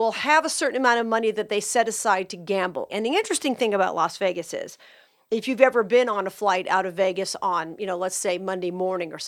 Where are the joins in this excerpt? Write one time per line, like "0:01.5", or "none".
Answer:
0:02.9